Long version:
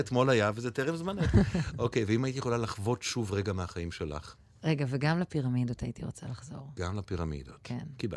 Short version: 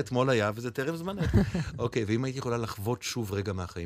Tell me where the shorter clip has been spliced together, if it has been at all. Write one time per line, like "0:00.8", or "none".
none